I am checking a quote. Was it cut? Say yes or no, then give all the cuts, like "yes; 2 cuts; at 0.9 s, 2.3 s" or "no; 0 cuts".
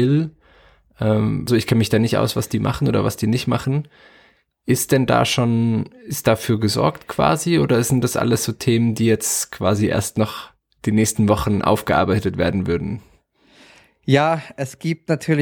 yes; 1 cut; at 1.5 s